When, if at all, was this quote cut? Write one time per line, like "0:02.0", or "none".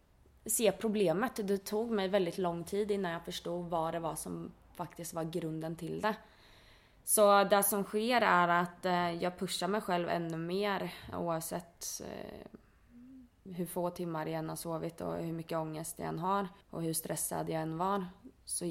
0:11.1
0:13.5
0:16.6